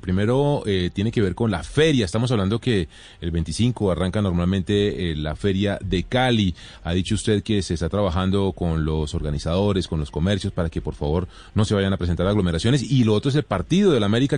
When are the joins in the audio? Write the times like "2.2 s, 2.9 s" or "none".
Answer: none